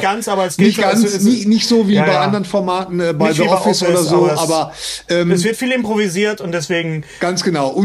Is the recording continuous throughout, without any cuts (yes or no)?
yes